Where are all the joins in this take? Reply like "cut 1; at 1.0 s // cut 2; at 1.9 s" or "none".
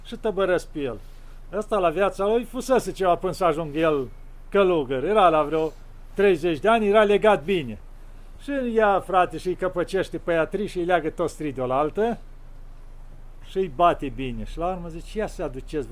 none